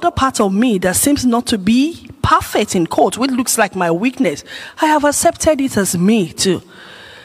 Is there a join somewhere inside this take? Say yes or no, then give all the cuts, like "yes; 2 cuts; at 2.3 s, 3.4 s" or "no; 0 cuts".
no; 0 cuts